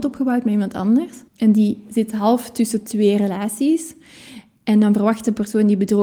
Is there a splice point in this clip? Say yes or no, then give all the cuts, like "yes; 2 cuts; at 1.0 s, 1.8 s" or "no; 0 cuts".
yes; 1 cut; at 1.3 s